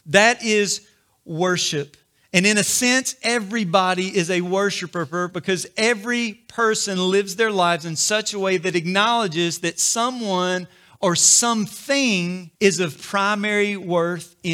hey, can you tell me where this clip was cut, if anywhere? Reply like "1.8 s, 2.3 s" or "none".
12.5 s

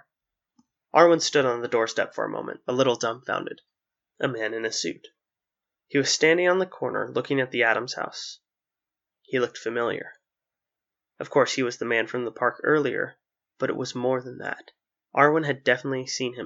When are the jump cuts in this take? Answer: 4.0 s

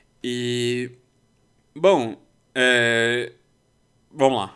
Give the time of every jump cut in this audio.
none

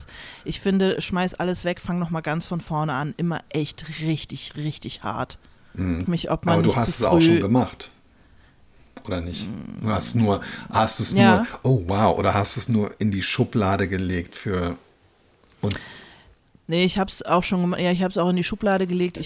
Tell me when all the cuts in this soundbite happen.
6.1 s

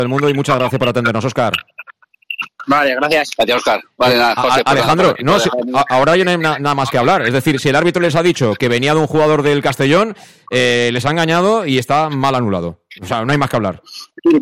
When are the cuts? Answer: none

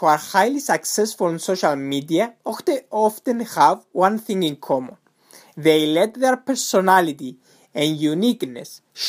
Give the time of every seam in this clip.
none

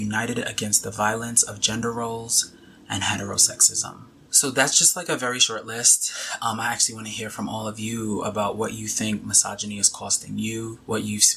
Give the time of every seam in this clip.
none

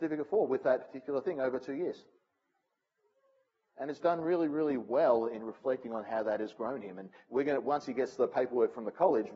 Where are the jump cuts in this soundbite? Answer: none

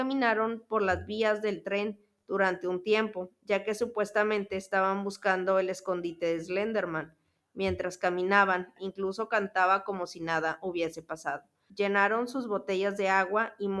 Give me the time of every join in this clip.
8.8 s, 11.7 s

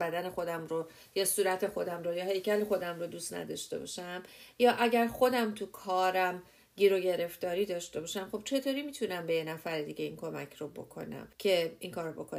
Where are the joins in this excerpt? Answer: 11.3 s

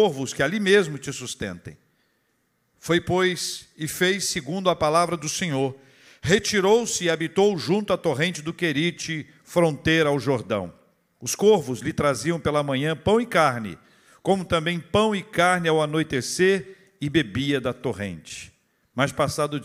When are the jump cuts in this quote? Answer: none

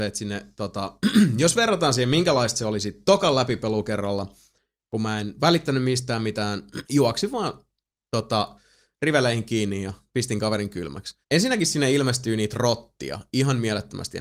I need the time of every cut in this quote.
6.8 s, 11.2 s

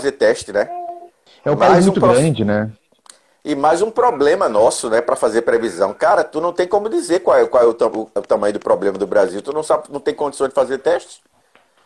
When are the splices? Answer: 1.3 s

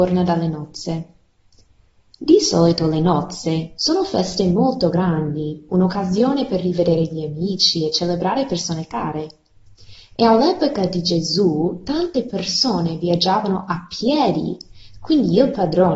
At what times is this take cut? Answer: 3.8 s

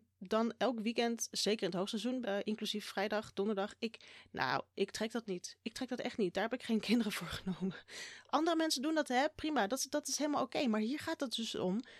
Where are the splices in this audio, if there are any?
2.2 s

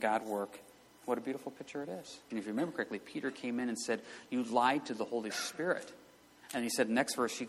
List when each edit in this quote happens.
2.3 s

